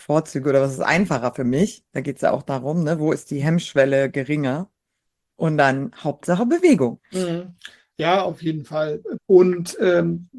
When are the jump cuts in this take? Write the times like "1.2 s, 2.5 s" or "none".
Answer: 7.0 s, 9.2 s